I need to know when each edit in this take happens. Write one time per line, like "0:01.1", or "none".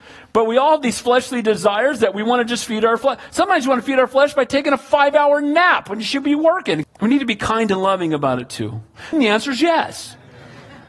0:06.8
0:09.1

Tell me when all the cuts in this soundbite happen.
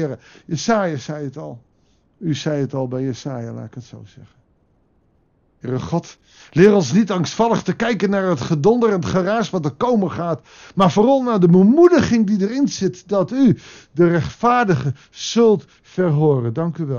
none

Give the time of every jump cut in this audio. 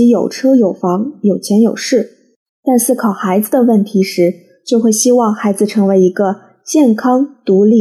none

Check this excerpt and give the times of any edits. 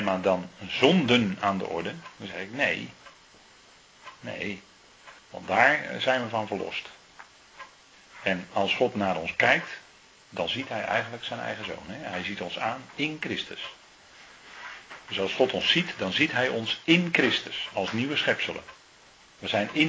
0:05.2

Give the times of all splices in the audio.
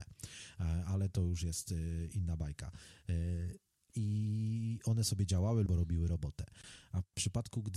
0:03.9
0:05.7

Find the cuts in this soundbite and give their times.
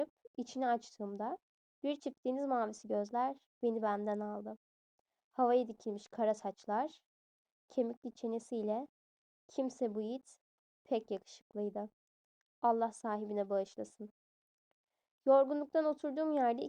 none

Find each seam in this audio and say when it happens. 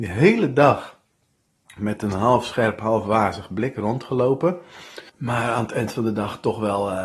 0:05.1

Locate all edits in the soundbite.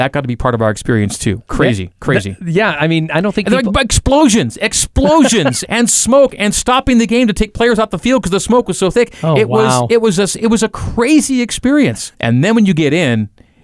0:05.6
0:12.1

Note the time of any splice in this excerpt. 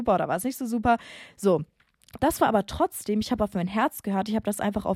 0:02.2

